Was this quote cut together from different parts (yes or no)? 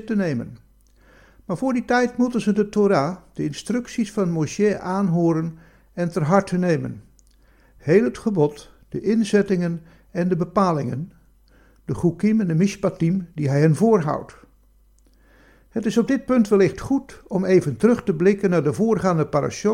no